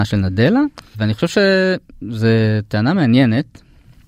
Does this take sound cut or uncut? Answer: cut